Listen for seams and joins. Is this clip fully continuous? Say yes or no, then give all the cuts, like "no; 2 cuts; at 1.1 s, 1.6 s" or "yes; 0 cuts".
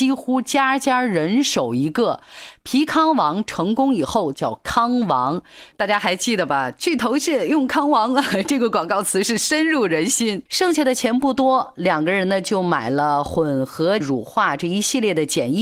no; 3 cuts; at 4.3 s, 10.5 s, 14.0 s